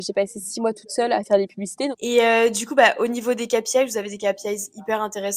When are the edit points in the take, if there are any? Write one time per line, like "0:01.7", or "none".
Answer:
0:01.9